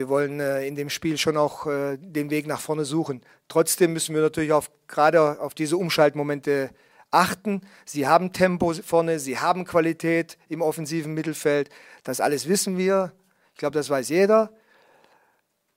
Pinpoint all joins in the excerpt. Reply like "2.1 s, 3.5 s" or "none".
none